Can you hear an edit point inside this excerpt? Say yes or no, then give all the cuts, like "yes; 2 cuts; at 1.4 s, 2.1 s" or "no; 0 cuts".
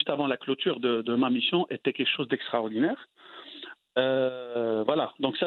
no; 0 cuts